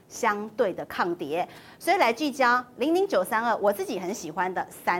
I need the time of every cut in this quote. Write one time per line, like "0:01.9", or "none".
none